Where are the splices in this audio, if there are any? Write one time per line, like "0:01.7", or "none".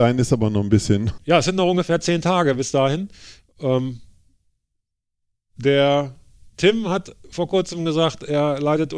0:01.2